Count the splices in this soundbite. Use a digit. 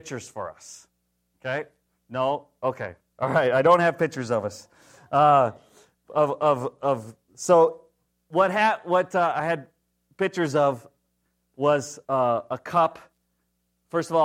1